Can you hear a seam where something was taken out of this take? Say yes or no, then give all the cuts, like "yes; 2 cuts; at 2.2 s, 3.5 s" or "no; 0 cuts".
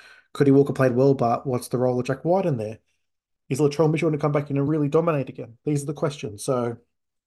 no; 0 cuts